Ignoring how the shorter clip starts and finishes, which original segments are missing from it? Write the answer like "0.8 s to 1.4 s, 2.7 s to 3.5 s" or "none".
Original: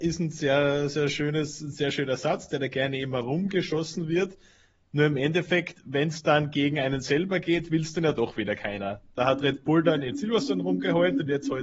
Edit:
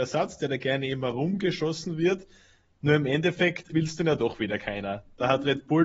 5.8 s to 7.7 s